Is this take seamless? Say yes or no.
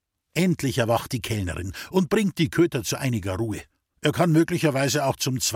no